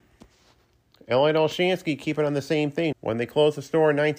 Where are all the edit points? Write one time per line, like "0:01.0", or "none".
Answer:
0:02.9